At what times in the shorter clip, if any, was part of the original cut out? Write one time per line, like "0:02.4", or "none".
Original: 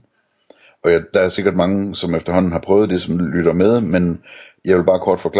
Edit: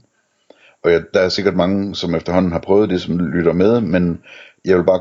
none